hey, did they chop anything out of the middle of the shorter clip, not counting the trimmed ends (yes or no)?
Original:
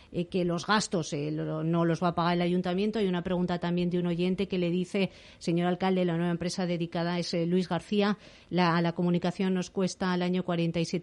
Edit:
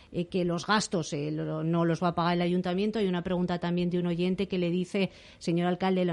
no